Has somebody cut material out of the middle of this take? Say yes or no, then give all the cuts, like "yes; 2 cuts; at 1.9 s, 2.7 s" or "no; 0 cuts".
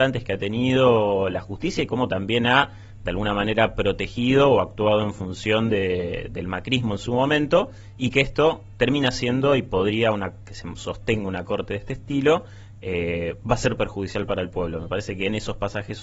no; 0 cuts